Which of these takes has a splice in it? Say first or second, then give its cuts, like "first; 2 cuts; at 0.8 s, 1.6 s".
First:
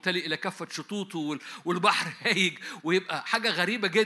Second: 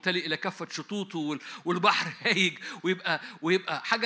first; 1 cut; at 2.8 s